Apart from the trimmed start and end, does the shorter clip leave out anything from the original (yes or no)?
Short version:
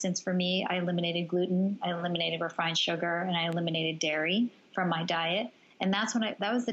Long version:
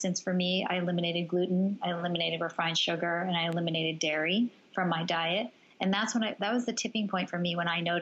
no